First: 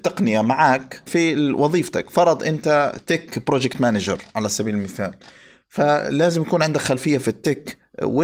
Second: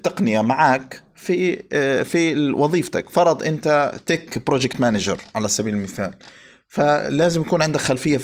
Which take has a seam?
first; 1 cut; at 1.1 s

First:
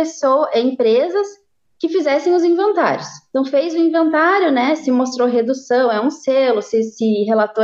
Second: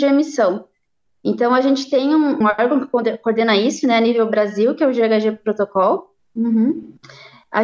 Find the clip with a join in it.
second; 2 cuts; at 2.4 s, 6.2 s

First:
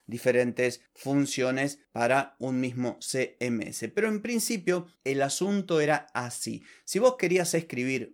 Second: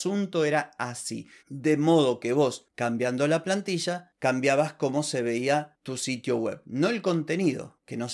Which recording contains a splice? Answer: second; 1 cut; at 1.4 s

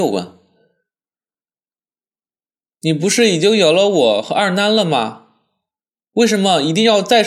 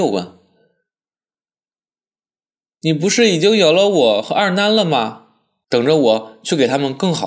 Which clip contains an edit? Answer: second; 1 cut; at 5.6 s

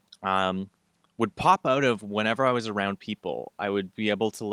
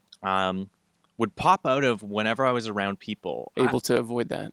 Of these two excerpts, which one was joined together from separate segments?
second; 1 cut; at 3.5 s

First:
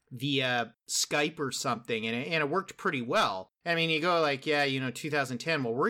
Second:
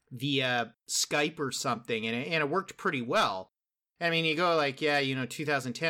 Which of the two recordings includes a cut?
first; 1 cut; at 3.6 s

